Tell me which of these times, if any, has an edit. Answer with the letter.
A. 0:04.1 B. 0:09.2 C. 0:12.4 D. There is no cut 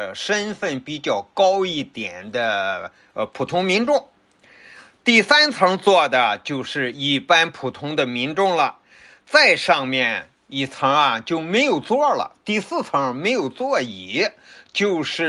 D